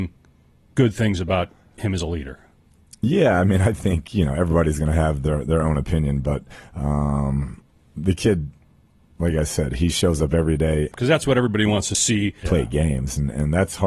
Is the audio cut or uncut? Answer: cut